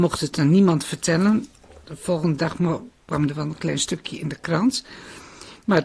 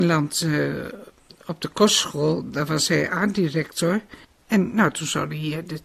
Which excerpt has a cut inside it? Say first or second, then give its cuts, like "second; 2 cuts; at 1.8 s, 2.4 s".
second; 1 cut; at 4.4 s